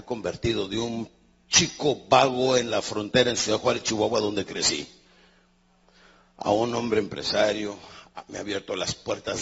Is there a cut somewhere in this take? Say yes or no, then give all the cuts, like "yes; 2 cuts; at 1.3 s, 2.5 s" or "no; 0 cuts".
no; 0 cuts